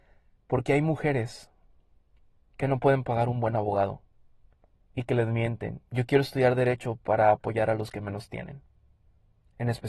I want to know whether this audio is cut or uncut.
cut